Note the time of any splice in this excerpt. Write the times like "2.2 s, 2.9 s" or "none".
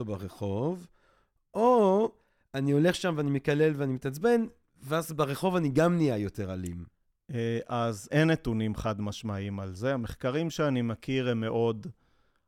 8.1 s